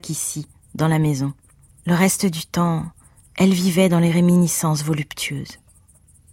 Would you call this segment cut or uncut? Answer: cut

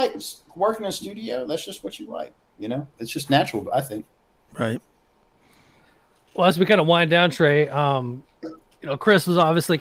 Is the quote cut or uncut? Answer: cut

